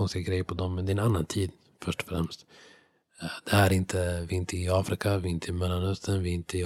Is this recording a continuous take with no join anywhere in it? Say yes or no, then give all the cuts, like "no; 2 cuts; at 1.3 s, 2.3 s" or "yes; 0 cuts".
yes; 0 cuts